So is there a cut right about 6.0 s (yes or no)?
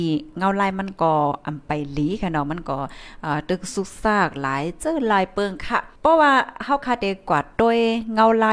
yes